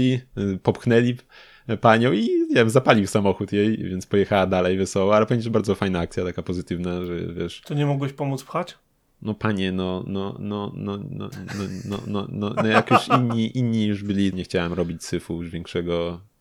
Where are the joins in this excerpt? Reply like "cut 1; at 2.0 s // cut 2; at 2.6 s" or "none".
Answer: cut 1; at 14.3 s